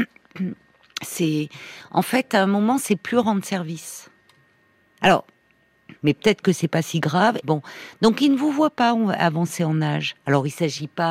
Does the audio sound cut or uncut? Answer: cut